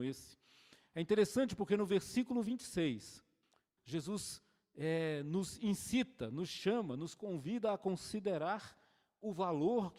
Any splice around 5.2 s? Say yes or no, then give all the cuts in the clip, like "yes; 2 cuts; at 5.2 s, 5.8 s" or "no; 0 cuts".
no; 1 cut; at 3.8 s